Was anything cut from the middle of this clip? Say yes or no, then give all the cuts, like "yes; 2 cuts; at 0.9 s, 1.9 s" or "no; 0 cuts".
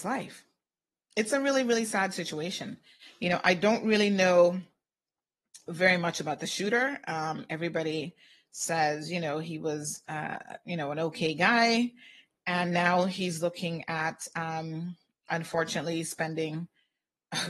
no; 0 cuts